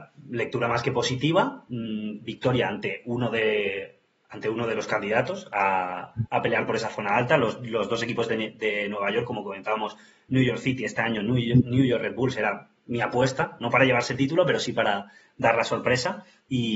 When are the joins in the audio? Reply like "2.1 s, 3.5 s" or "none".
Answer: none